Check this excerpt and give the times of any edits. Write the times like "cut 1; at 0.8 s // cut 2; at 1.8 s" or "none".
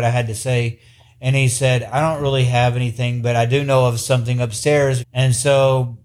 cut 1; at 5.0 s